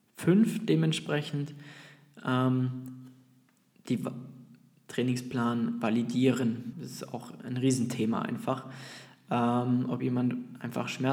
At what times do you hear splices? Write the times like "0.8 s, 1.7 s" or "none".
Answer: 6.7 s